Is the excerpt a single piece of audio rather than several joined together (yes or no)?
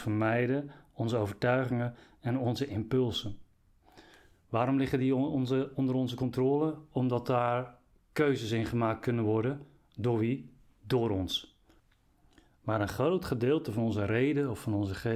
yes